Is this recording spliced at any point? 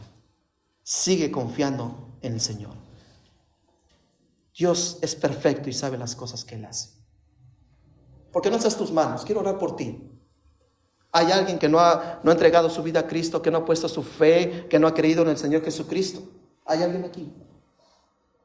yes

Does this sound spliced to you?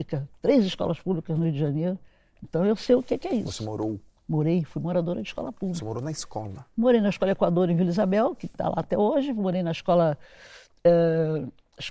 no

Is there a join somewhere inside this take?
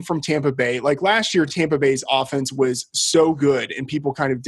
no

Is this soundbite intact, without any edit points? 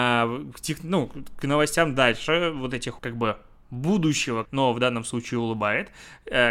no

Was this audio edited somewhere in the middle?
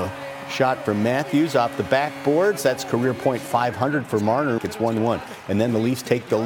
yes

